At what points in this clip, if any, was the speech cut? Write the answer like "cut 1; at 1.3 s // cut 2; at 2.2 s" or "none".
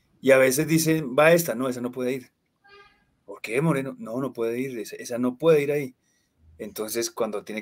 none